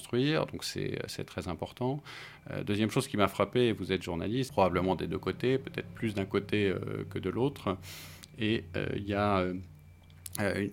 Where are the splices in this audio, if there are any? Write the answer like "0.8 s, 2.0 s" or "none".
4.5 s